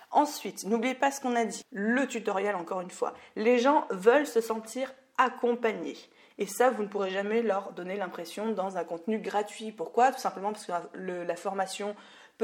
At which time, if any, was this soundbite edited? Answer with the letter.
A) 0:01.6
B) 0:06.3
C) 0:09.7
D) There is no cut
A